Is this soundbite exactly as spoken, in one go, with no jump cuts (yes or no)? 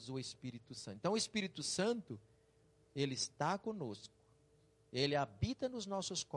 yes